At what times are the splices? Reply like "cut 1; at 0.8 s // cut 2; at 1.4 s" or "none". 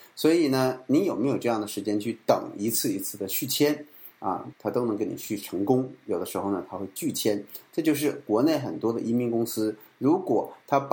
cut 1; at 4.5 s